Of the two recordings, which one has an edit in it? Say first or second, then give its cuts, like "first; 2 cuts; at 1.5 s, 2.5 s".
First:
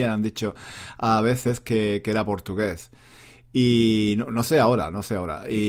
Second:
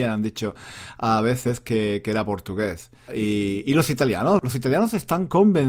second; 2 cuts; at 3.1 s, 4.4 s